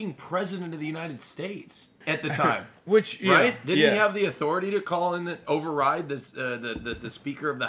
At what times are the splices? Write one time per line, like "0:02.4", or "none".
0:02.0